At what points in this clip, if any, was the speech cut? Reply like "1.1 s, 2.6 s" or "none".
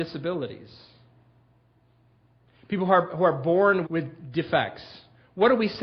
3.8 s

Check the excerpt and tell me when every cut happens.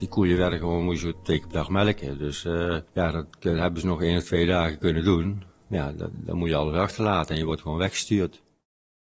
2.9 s

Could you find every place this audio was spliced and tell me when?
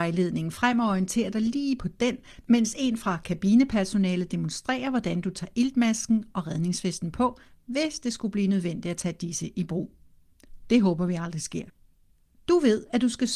none

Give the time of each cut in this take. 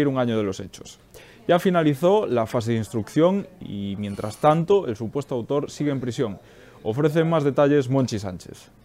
none

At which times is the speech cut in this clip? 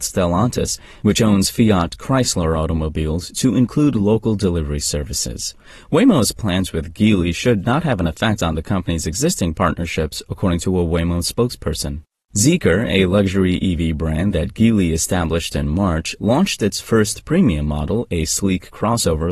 none

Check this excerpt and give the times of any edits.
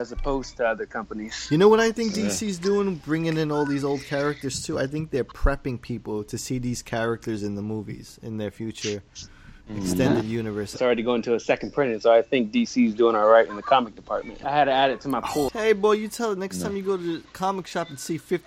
10.7 s, 14.4 s, 15.5 s

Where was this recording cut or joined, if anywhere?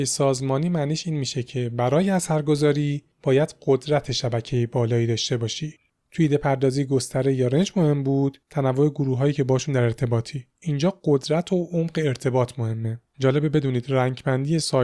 10.5 s

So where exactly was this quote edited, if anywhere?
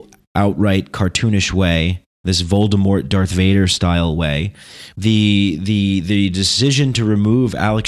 4.9 s

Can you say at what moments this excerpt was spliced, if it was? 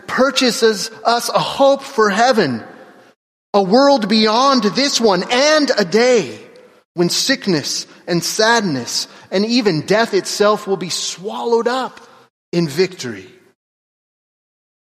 none

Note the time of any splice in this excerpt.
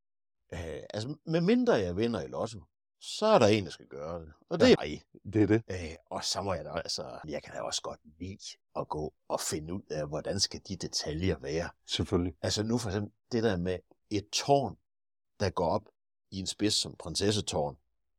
4.8 s, 7.2 s

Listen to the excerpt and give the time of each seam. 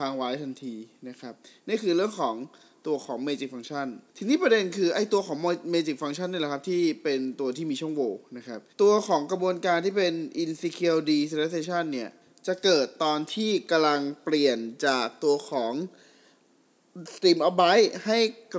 4.1 s, 8.7 s

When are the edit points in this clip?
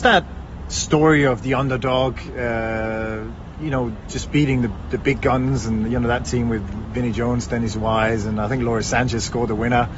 none

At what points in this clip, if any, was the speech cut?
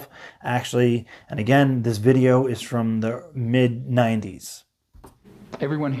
none

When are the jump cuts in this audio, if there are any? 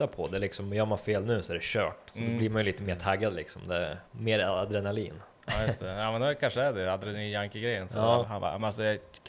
4.1 s, 8.2 s

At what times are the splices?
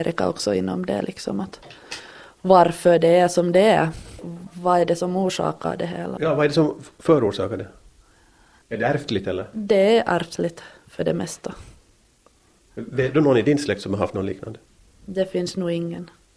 6.2 s, 8.6 s, 12.6 s

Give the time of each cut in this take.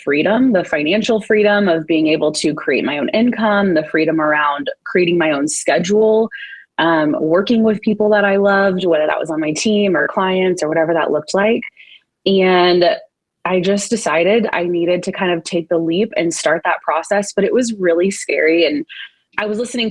none

